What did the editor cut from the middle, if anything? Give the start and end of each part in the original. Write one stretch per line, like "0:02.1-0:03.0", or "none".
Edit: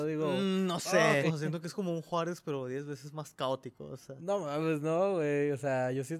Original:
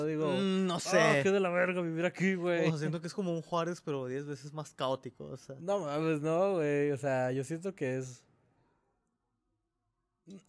0:01.2-0:02.6